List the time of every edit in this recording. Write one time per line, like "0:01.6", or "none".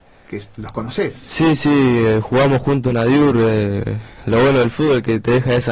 none